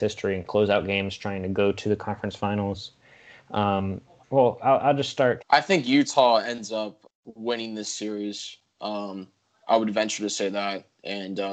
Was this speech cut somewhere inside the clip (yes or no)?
yes